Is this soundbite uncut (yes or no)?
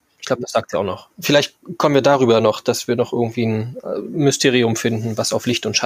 yes